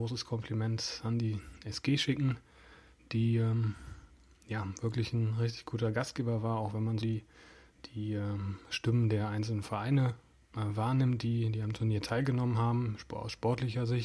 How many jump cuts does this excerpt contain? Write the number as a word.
one